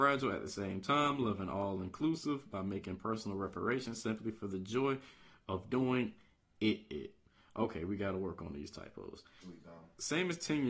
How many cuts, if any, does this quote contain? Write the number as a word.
one